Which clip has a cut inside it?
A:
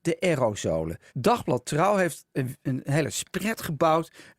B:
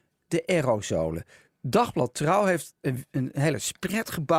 A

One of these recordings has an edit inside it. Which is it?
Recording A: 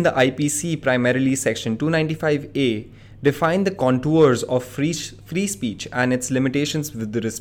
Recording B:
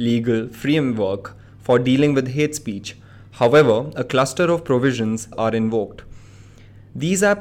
B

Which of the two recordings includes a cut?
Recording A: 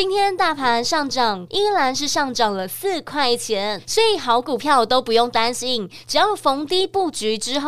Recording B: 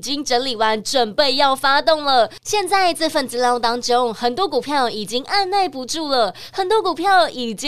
A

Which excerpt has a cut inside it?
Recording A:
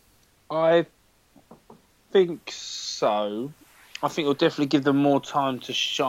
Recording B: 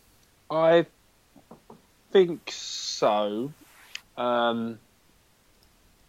B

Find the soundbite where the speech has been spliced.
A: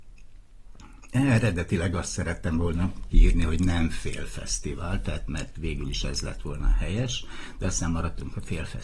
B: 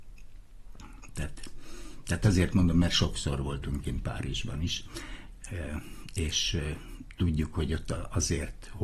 B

